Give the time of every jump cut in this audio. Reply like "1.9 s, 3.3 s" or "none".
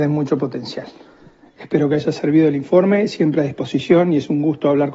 none